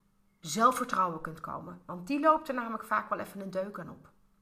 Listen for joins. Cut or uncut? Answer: uncut